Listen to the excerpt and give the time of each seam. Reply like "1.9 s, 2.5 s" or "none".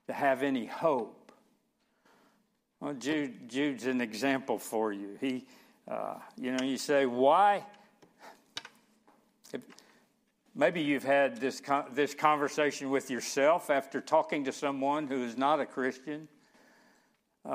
none